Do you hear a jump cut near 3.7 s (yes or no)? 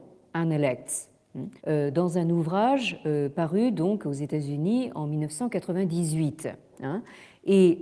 no